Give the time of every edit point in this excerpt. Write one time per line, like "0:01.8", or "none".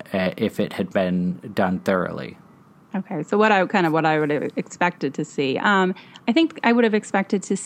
none